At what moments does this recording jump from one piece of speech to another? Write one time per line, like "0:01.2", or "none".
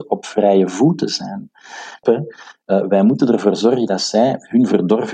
0:02.0